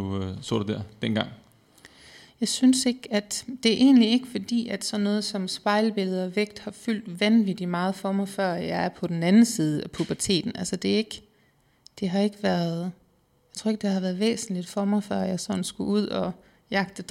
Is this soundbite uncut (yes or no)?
no